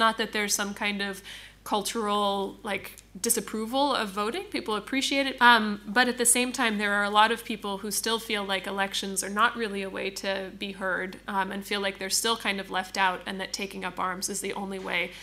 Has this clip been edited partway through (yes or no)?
yes